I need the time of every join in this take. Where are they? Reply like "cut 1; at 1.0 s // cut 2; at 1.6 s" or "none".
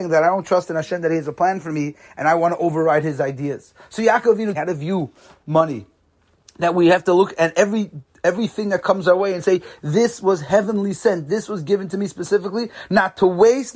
cut 1; at 4.5 s